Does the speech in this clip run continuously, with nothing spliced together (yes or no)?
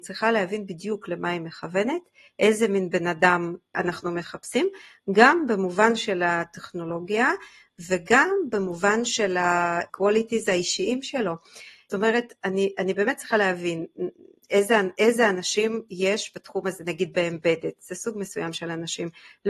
yes